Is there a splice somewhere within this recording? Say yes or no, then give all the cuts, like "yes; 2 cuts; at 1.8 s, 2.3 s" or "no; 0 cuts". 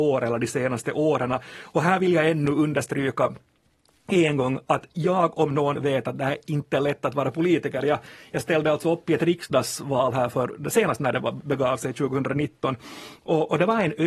no; 0 cuts